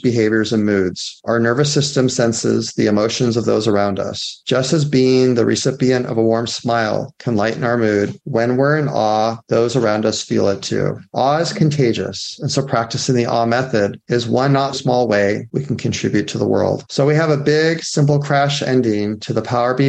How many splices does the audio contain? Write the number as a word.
two